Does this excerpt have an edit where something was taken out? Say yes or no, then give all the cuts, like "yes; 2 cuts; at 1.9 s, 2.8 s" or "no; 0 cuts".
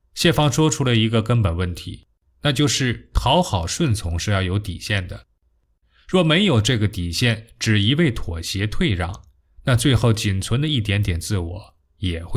no; 0 cuts